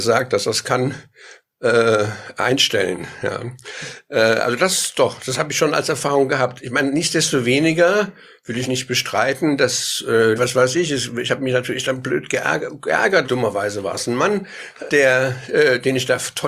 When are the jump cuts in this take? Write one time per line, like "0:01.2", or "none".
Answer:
0:10.4
0:13.2
0:14.9